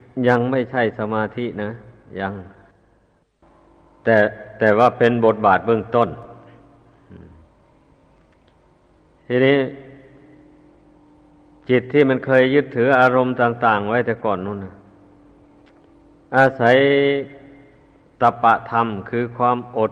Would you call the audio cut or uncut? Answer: uncut